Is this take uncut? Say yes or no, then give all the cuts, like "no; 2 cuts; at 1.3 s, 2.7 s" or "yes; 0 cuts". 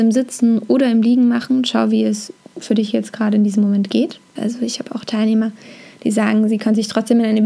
no; 1 cut; at 4.4 s